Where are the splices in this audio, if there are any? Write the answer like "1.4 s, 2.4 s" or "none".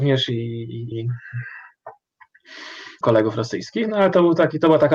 0.9 s, 3.0 s